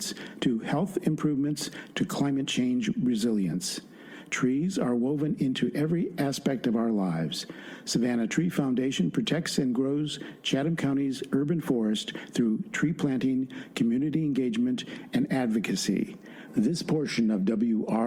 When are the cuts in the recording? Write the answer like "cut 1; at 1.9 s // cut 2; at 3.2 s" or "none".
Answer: cut 1; at 16.5 s